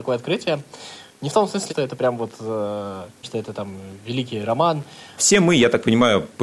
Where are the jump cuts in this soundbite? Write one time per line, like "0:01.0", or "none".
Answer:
0:01.7
0:03.2
0:05.2